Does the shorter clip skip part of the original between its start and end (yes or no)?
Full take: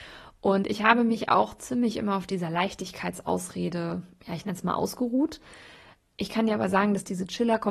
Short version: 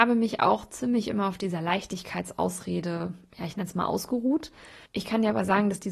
yes